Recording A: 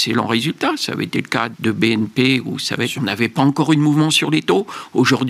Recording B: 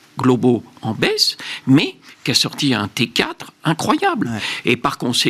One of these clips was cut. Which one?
A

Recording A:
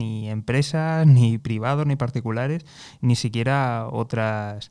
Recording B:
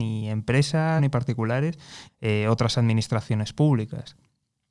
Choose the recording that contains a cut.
B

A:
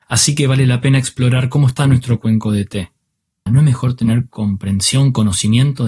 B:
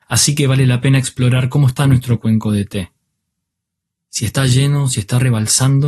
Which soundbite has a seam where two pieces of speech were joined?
A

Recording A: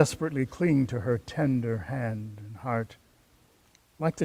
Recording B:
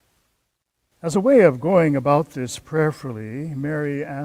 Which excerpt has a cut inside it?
B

